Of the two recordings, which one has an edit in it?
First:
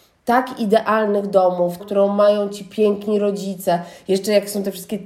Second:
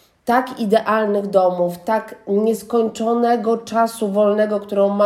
first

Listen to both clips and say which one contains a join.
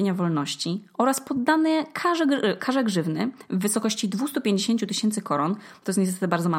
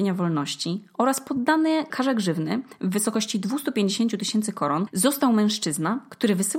second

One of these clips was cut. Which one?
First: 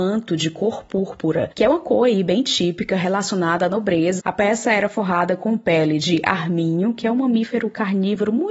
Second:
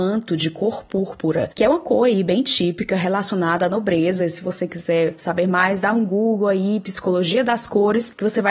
first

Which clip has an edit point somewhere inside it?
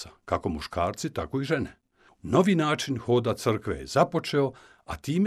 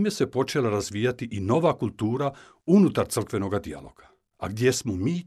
first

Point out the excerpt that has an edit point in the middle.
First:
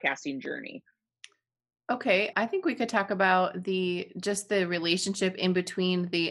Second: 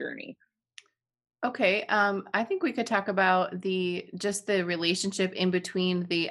first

